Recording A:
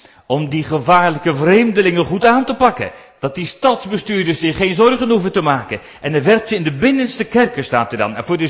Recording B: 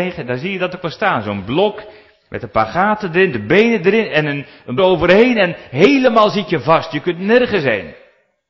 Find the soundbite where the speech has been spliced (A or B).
B